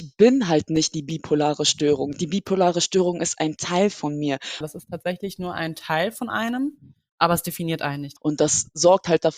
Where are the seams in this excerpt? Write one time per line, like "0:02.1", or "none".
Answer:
0:04.6
0:08.2